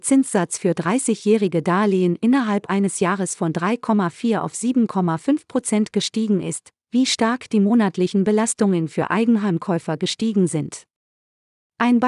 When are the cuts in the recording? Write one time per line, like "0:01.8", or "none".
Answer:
0:06.8